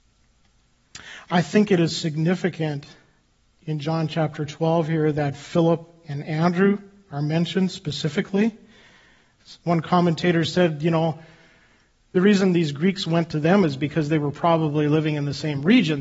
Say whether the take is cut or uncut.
uncut